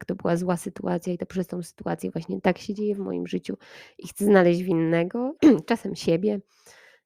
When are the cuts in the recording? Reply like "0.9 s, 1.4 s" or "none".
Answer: 5.4 s